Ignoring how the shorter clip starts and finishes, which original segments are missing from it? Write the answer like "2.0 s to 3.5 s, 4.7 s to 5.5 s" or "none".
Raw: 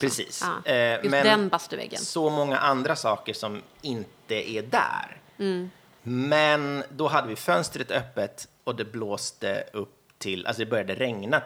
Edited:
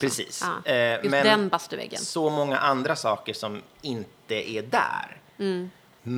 none